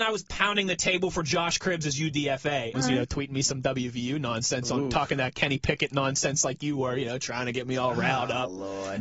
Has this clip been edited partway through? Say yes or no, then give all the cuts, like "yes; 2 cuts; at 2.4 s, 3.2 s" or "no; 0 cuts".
yes; 1 cut; at 2.7 s